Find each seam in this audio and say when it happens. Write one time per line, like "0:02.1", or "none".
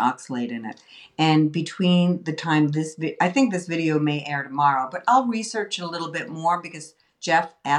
none